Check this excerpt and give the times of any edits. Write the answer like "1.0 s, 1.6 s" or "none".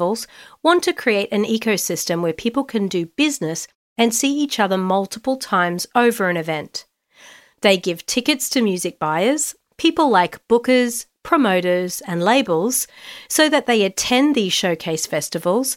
none